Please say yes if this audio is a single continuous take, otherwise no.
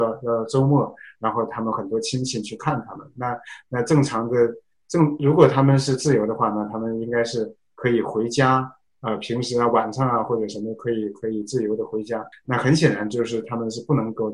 no